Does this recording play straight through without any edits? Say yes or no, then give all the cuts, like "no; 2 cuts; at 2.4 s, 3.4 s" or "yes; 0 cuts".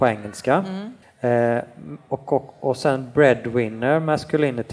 no; 1 cut; at 1.0 s